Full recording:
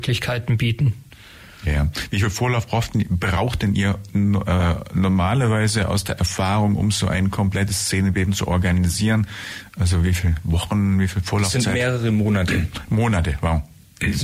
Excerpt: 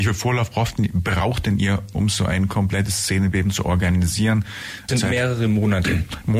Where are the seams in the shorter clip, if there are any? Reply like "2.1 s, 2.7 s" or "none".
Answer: 1.9 s, 4.9 s